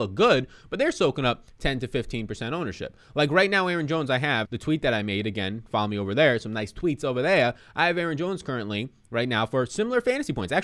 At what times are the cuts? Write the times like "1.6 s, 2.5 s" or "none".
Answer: 4.4 s